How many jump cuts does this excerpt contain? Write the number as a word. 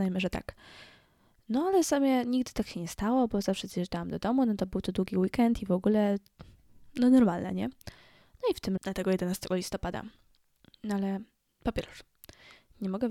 one